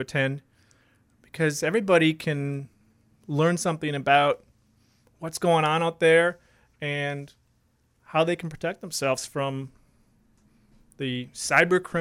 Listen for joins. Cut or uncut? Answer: uncut